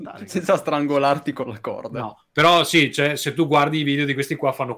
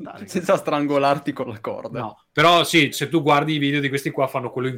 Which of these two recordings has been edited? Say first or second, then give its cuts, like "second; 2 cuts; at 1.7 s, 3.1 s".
second; 1 cut; at 2.9 s